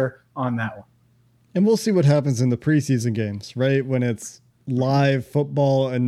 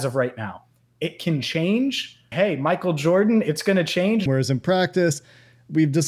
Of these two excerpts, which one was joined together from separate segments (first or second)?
second